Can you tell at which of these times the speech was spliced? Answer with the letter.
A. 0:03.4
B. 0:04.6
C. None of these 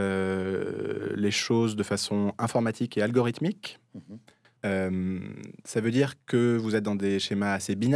B